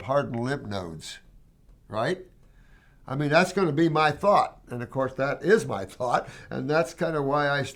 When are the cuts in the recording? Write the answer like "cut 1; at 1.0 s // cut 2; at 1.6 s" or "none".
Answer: none